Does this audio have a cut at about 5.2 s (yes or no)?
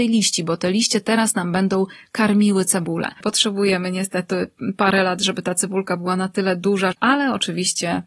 no